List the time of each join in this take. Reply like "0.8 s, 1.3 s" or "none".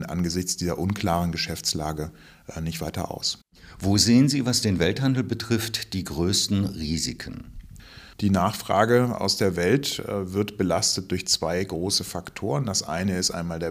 8.1 s